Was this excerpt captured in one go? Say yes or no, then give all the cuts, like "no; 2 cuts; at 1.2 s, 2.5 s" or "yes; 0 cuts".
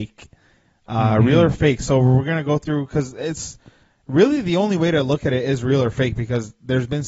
yes; 0 cuts